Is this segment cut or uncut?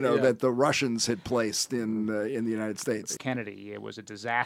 cut